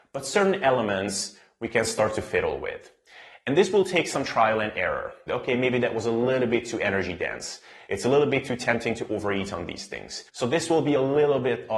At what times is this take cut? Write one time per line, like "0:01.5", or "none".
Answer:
0:05.3